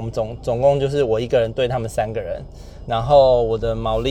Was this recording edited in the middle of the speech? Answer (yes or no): yes